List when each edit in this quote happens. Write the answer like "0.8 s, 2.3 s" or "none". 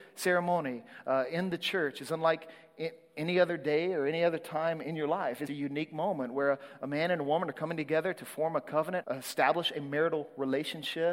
5.5 s, 9.0 s